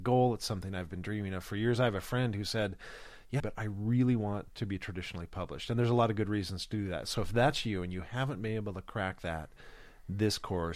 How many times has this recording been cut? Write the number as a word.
one